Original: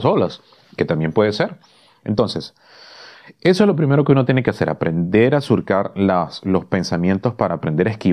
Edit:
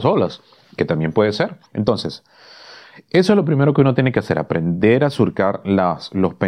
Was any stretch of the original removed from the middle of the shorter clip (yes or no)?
yes